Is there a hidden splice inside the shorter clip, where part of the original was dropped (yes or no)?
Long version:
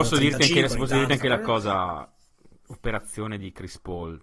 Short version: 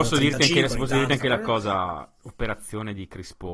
yes